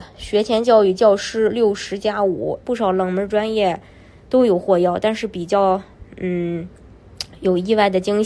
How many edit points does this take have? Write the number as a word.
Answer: one